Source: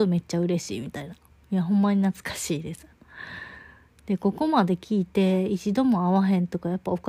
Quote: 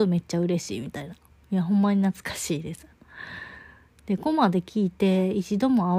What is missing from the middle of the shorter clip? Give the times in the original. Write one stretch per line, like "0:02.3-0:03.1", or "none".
0:04.2-0:04.3

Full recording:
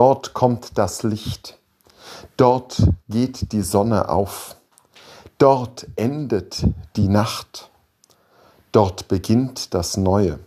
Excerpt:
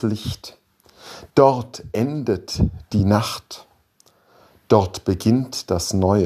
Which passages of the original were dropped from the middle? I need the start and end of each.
0:02.3-0:05.3

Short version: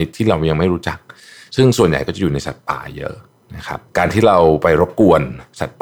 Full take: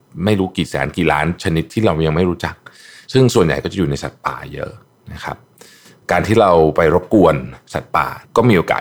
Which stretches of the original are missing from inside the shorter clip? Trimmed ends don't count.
0:05.5-0:06.0

